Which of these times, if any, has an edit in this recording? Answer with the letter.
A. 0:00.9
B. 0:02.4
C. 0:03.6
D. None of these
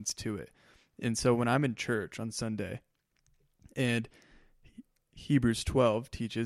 D